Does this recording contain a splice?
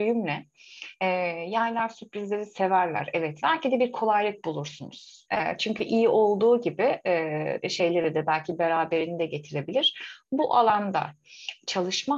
yes; 3 cuts; at 3.4 s, 5.3 s, 7.6 s

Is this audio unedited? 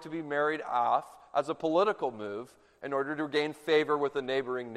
yes; 0 cuts

